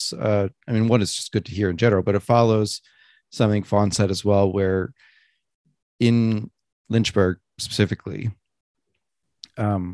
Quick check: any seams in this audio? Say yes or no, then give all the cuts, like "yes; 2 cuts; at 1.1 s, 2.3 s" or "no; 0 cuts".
no; 0 cuts